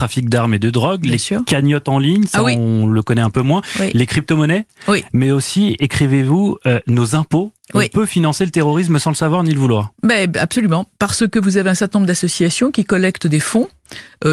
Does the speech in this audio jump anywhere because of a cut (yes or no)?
no